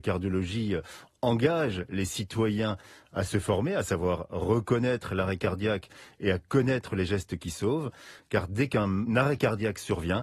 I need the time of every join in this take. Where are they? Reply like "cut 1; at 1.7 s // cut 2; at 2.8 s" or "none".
none